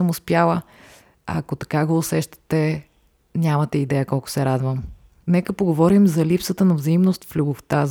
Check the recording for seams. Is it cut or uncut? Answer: uncut